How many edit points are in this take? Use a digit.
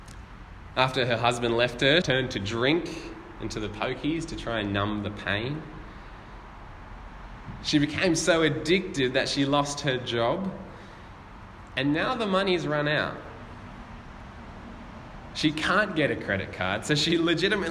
1